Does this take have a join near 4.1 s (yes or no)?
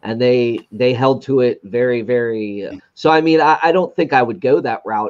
no